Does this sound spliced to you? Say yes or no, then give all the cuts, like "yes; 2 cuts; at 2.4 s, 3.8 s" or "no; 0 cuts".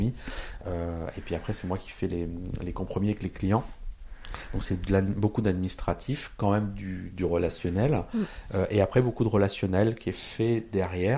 no; 0 cuts